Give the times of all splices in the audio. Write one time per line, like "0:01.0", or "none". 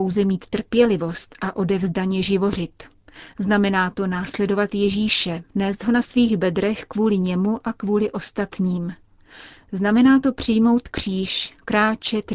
0:05.5